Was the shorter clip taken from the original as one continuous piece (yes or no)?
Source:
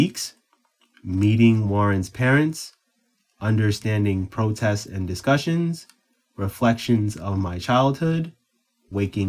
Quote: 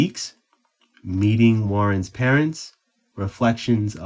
no